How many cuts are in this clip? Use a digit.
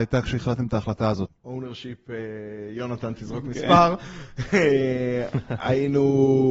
1